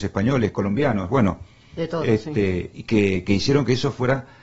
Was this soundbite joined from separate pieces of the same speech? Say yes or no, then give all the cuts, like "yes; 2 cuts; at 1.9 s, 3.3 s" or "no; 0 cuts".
no; 0 cuts